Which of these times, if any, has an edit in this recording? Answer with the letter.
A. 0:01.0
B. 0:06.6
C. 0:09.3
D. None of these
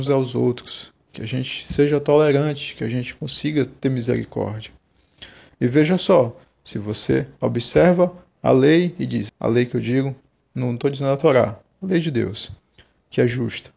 C